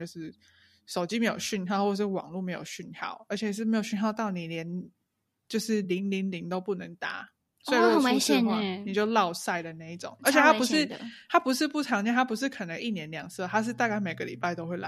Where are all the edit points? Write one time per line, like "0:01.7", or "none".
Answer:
none